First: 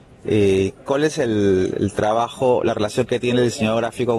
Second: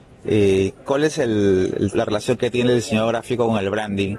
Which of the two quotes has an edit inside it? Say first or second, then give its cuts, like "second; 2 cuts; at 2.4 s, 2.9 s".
second; 1 cut; at 1.9 s